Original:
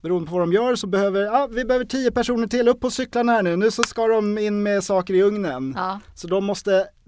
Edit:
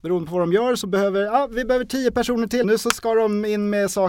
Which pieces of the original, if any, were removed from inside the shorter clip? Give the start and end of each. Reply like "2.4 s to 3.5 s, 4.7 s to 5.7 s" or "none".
2.6 s to 3.6 s